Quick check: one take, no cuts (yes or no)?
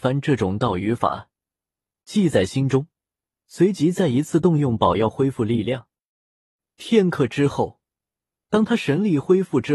yes